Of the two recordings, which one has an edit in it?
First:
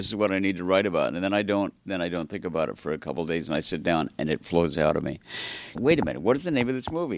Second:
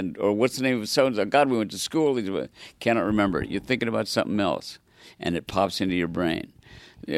first; 1 cut; at 5.7 s

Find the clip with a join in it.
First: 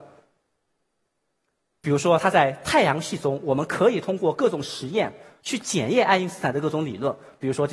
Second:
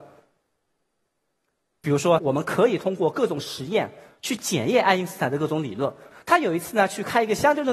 second; 2 cuts; at 2.2 s, 6.1 s

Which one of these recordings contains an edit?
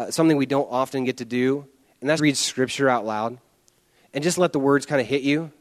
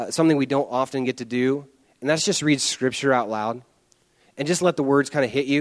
first; 1 cut; at 2.2 s

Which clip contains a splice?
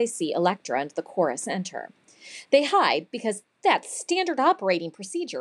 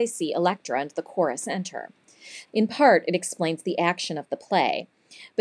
second; 1 cut; at 2.5 s

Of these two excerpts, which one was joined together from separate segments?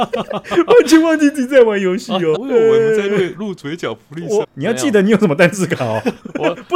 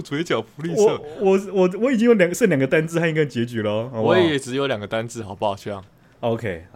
first; 2 cuts; at 2.4 s, 4.4 s

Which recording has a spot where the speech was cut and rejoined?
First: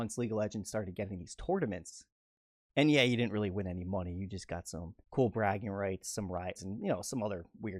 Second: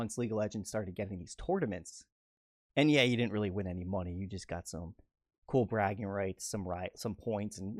first; 2 cuts; at 5.0 s, 6.6 s

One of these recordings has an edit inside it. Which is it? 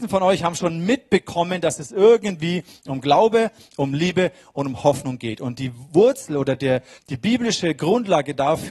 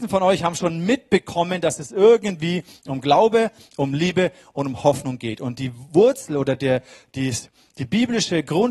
first; 1 cut; at 7.0 s

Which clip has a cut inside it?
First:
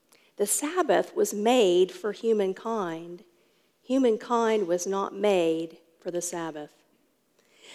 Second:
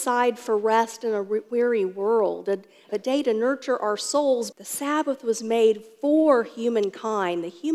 second; 2 cuts; at 2.9 s, 4.5 s

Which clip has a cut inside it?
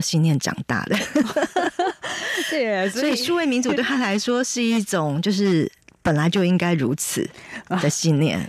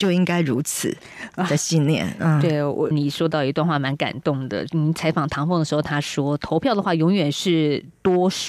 second; 1 cut; at 2.9 s

